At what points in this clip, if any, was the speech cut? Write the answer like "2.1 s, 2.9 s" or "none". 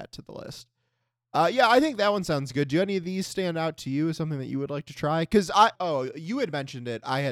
5.7 s